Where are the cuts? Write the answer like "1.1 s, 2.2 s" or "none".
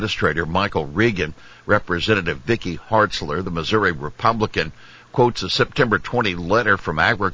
none